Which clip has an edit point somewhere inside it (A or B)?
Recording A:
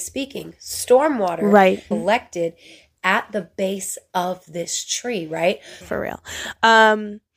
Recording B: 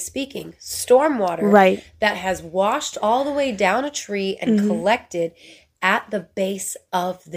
A